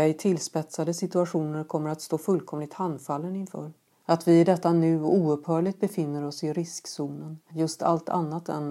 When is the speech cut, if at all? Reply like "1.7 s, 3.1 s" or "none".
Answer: 3.9 s, 7.5 s